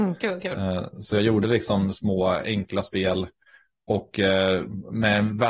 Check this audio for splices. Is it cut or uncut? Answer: uncut